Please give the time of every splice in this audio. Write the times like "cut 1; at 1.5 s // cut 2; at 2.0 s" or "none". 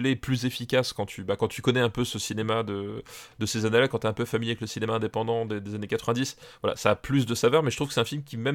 none